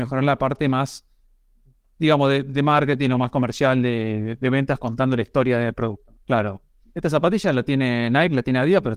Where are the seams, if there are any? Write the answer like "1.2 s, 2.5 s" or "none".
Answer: 6.1 s